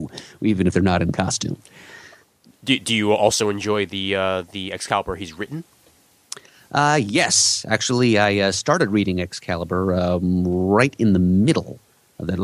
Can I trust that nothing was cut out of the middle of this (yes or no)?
yes